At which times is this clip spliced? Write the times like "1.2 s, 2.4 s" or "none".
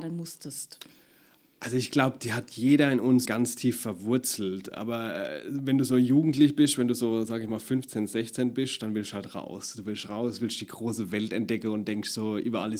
3.3 s